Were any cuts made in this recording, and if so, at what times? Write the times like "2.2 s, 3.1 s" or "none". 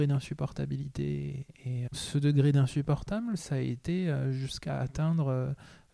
1.9 s